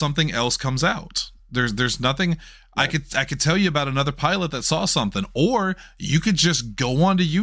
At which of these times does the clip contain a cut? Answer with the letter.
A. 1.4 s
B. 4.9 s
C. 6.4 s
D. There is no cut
D